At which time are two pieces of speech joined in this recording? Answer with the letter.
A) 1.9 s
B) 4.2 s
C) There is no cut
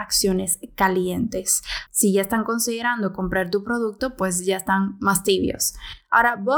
A